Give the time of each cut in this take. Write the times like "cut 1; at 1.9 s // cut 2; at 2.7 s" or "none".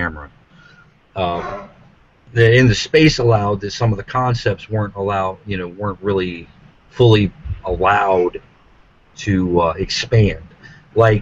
none